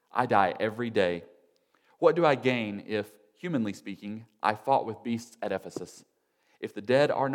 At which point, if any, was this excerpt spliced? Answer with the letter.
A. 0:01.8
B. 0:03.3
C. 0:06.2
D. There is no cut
D